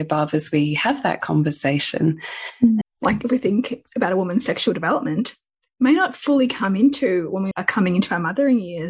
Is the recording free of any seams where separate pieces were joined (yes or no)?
no